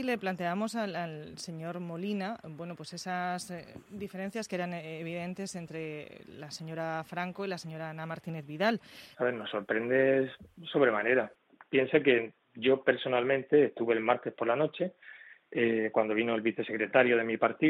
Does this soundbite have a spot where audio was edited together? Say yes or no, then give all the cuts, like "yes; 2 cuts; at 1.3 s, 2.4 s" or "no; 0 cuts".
yes; 1 cut; at 9.1 s